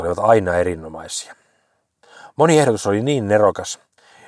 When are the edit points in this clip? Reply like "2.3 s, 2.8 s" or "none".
none